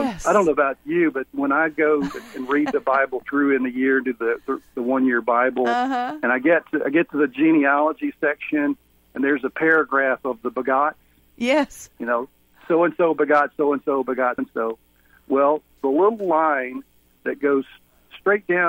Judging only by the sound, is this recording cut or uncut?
cut